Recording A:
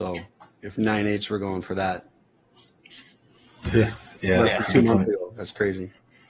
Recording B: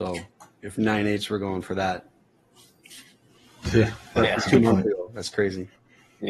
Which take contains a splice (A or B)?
B